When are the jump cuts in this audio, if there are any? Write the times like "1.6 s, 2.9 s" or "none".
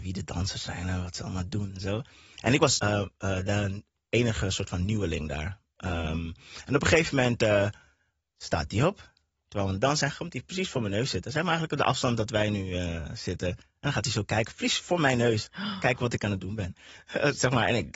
2.8 s